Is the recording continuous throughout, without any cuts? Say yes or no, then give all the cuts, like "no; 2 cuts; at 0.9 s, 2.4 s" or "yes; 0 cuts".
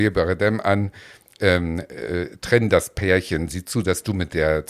yes; 0 cuts